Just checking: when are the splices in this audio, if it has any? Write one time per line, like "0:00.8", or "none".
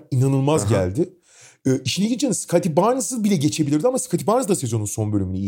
none